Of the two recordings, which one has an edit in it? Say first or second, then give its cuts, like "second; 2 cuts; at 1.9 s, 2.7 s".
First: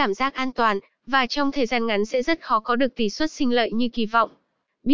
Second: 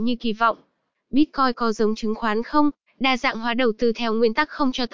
second; 1 cut; at 2.9 s